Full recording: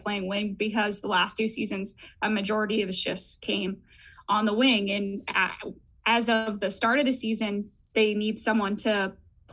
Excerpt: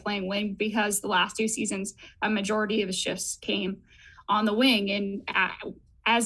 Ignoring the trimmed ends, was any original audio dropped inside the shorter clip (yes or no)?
no